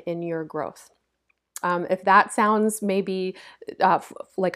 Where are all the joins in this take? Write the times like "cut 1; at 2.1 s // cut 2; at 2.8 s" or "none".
cut 1; at 1.6 s